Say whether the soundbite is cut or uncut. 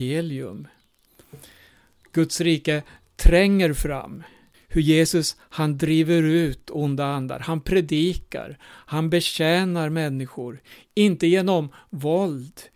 cut